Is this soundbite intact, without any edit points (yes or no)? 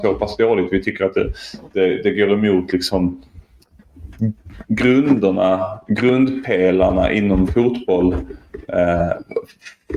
yes